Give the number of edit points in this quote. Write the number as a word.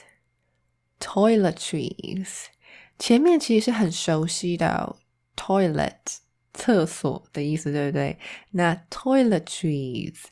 zero